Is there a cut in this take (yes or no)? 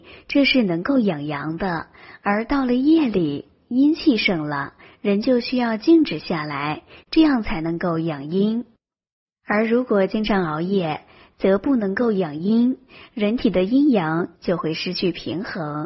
yes